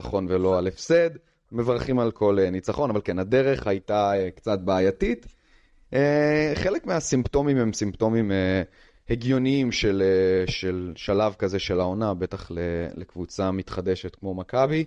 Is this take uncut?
yes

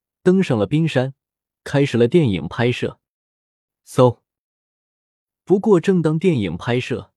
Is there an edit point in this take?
no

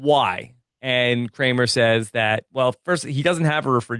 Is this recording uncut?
no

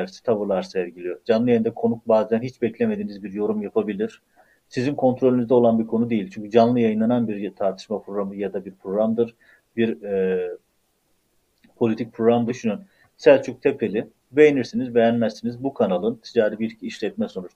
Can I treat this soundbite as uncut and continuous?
no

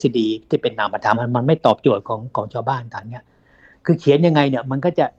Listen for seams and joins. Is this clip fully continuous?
no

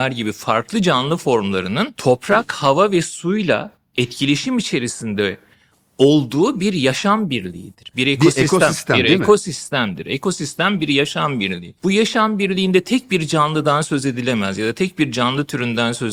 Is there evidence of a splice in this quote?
no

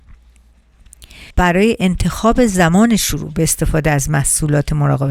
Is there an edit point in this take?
yes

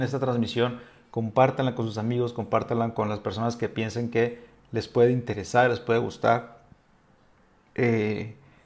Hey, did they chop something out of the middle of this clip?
no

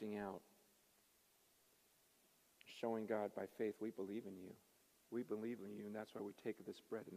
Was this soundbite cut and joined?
no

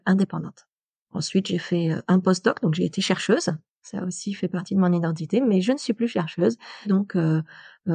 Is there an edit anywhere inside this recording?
yes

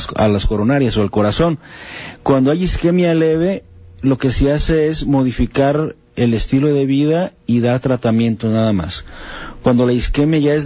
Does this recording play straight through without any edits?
yes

